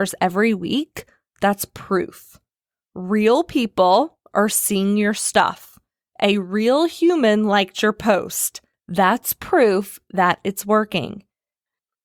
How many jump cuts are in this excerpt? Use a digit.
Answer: 0